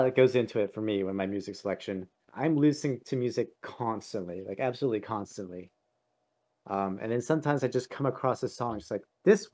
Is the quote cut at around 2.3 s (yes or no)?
yes